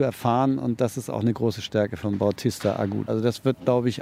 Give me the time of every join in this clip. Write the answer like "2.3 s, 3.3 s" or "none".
3.1 s